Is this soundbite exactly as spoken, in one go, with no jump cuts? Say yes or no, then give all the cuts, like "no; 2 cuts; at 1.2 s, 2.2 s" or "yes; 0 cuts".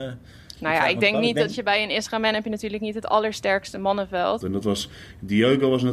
no; 1 cut; at 4.4 s